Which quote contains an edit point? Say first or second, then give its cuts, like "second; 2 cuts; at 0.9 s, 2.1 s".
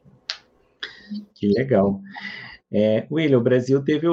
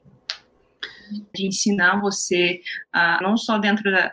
second; 2 cuts; at 1.3 s, 3.2 s